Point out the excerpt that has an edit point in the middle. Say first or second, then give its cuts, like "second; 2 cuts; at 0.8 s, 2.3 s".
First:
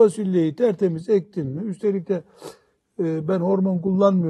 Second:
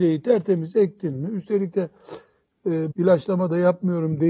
second; 1 cut; at 2.9 s